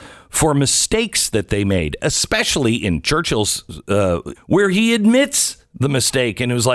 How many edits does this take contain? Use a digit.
1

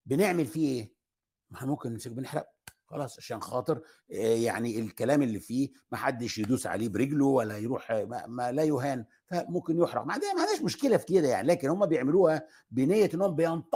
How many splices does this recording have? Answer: 0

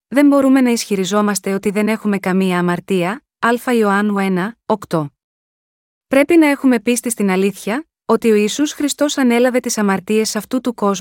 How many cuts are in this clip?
0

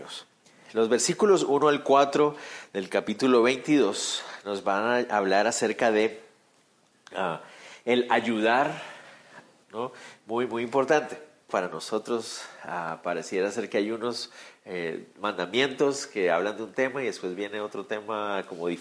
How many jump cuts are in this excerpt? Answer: 2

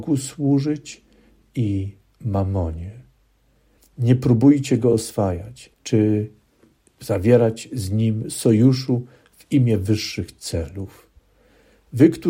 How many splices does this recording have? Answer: 2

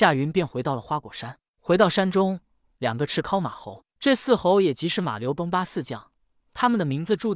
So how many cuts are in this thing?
1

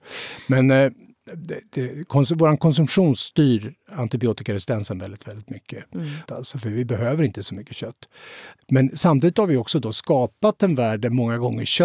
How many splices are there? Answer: 2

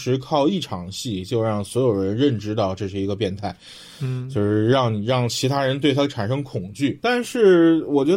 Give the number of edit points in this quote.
0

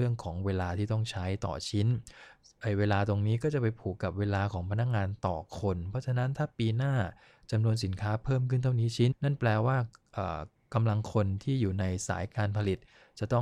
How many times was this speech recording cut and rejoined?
1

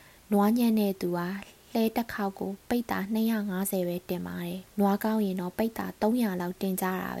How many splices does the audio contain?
1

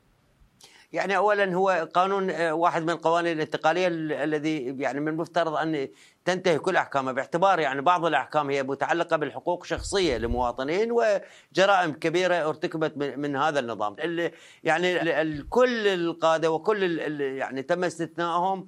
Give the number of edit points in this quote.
2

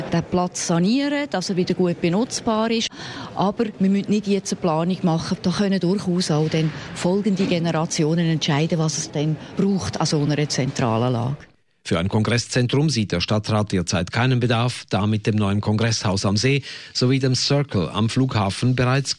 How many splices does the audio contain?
0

